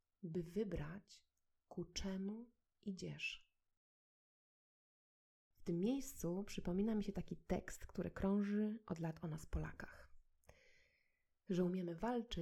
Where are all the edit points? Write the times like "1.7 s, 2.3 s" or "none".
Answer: none